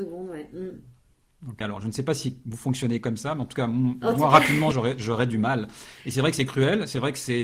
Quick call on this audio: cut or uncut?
cut